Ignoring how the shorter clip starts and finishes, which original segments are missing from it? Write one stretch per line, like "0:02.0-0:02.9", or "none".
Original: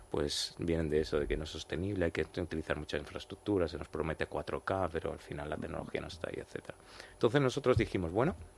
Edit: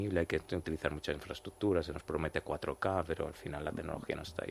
none